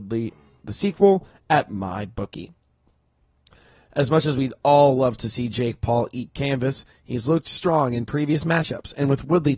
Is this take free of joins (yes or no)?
yes